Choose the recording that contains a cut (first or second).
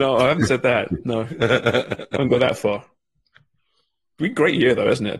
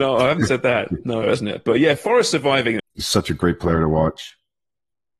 second